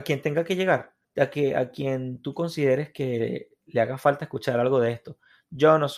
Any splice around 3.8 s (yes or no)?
no